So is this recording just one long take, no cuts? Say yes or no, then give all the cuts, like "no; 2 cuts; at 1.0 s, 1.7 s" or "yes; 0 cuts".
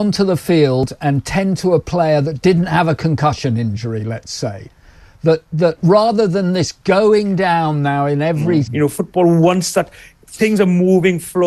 no; 1 cut; at 8.7 s